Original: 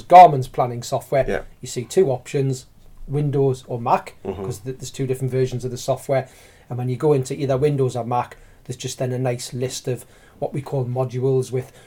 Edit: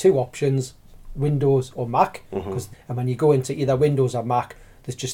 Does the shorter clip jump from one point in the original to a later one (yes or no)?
yes